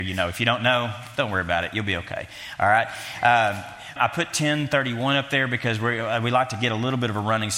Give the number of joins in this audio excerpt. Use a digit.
1